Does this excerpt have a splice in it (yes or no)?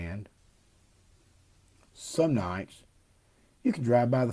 no